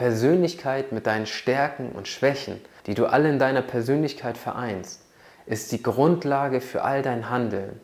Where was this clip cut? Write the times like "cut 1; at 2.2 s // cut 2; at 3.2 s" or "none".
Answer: cut 1; at 2.8 s